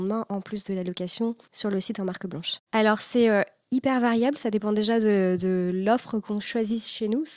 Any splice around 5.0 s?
no; 1 cut; at 2.7 s

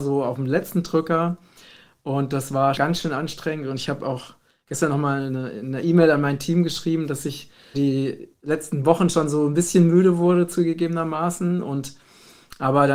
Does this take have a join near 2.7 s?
yes; 2 cuts; at 2.7 s, 7.7 s

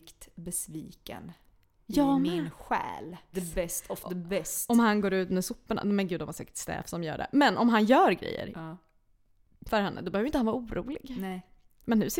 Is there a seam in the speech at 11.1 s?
no; 1 cut; at 3.3 s

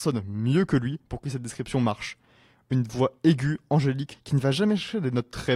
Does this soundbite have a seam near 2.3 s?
no; 1 cut; at 4.1 s

